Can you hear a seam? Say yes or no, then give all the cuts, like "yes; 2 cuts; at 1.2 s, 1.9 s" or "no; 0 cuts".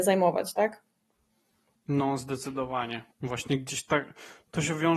yes; 2 cuts; at 1.8 s, 3.1 s